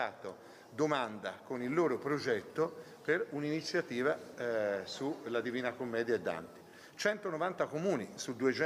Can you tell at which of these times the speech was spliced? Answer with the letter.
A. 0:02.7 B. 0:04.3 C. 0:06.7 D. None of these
D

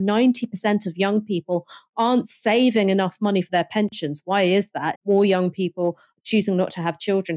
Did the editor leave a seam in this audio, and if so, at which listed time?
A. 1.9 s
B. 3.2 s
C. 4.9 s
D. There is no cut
C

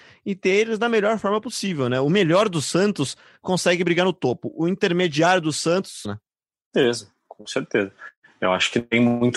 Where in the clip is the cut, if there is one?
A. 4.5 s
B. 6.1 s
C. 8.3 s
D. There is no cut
B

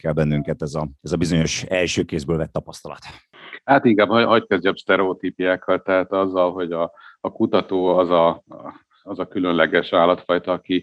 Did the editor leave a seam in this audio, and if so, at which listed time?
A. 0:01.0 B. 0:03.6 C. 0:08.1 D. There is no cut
A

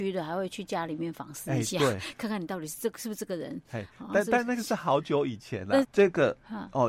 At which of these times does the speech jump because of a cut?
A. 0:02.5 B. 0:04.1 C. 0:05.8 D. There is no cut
C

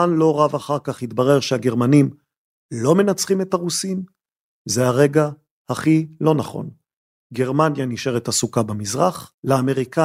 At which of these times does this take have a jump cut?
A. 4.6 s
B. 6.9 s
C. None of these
C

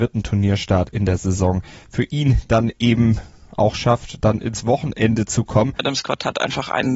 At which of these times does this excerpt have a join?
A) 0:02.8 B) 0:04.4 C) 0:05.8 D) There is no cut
C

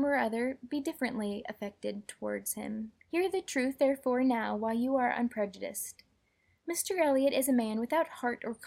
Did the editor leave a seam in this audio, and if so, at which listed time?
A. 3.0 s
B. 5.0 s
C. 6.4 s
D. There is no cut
A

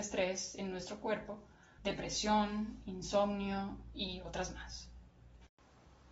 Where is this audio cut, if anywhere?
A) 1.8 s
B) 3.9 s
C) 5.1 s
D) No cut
A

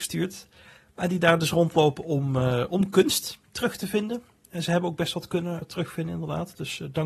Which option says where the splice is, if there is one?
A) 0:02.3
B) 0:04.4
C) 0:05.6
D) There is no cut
C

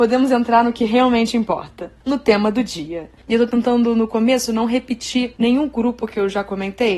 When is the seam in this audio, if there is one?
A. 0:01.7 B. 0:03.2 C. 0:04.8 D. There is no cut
B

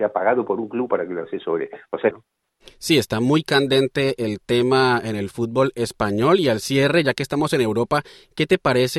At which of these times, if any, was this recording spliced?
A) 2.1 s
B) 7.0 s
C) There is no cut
A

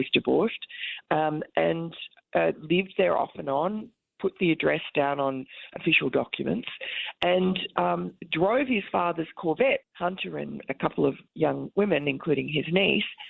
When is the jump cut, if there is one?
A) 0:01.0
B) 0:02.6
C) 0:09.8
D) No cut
C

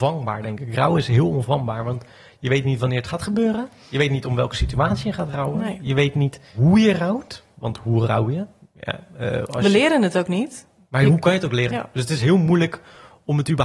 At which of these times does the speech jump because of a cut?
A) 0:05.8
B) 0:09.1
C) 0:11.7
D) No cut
C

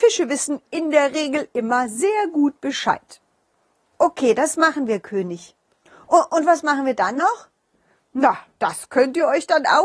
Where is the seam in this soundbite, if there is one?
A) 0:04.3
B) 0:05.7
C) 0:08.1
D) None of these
D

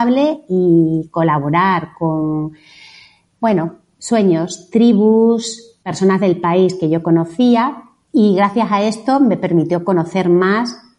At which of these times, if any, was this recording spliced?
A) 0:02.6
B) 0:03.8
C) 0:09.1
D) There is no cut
D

